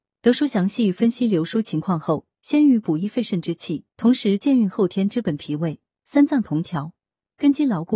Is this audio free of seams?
no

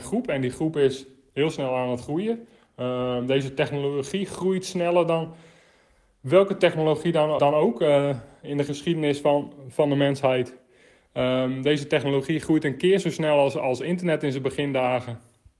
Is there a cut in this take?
yes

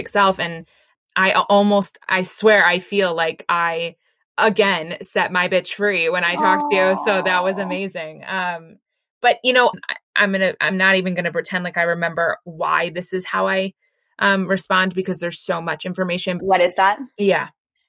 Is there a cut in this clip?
yes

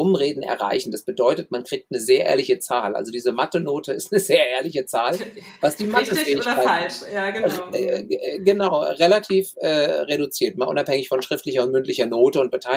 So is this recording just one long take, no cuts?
yes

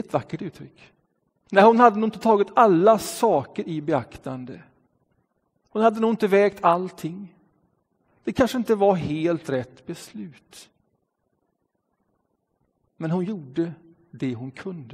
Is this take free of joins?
no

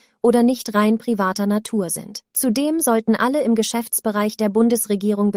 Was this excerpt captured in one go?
no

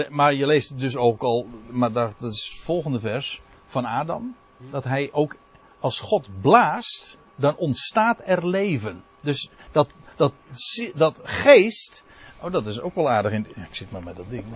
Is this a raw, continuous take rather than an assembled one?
yes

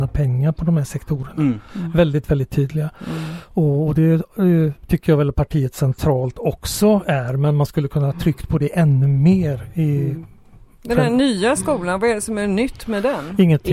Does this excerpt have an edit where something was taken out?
no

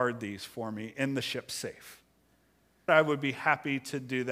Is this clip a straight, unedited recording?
no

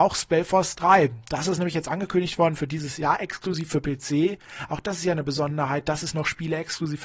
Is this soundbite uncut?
yes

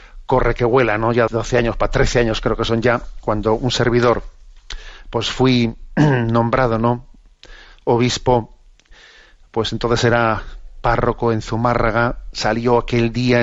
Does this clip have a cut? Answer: yes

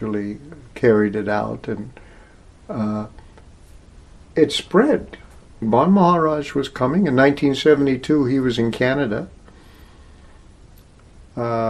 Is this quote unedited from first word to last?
no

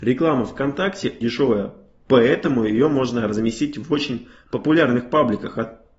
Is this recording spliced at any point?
yes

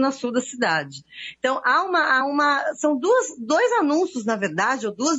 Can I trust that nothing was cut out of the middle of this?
yes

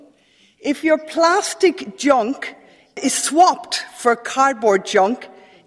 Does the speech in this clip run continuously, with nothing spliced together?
yes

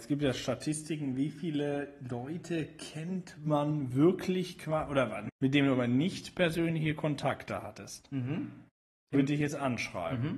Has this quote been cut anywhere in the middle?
yes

